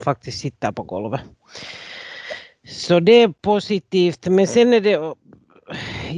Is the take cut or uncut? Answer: uncut